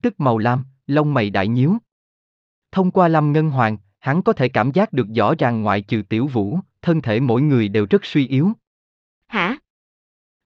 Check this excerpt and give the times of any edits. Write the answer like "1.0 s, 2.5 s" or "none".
9.1 s